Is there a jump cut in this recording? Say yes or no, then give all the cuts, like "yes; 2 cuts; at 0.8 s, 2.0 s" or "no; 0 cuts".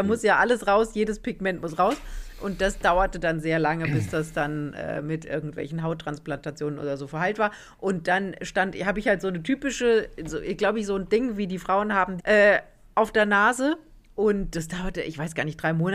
yes; 1 cut; at 12.2 s